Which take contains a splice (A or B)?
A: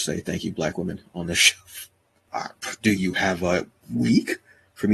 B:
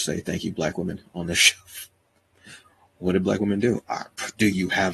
A